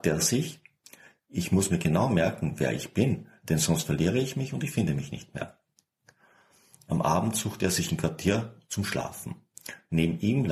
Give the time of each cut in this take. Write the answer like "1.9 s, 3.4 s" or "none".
none